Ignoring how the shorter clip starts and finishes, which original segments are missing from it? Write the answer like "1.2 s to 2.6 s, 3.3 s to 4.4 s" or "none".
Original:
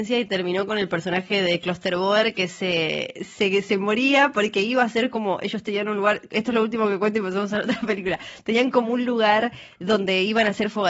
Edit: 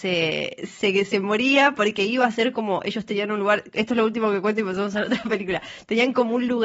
none